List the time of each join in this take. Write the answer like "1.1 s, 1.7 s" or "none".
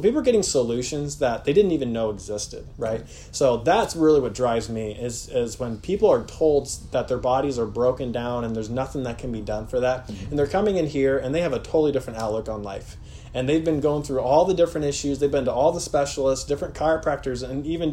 none